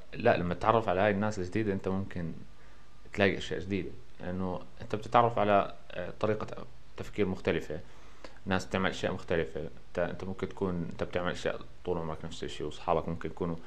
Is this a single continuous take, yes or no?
no